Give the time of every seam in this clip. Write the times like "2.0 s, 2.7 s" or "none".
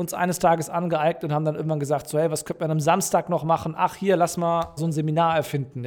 4.8 s